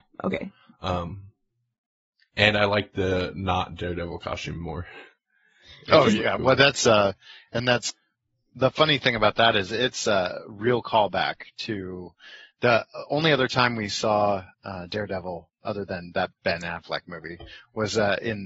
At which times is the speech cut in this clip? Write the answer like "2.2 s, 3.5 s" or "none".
14.5 s, 16.4 s